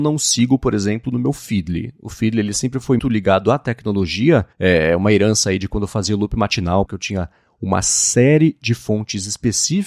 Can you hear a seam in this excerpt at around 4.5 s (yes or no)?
yes